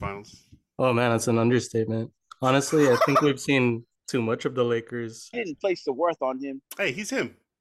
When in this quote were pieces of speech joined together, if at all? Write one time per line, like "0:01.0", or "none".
0:04.0
0:05.3
0:06.6